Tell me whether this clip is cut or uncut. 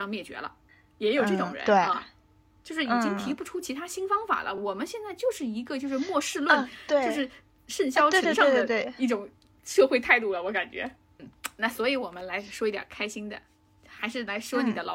uncut